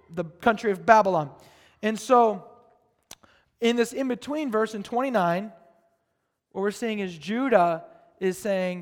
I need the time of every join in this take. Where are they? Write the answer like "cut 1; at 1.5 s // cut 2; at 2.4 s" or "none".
none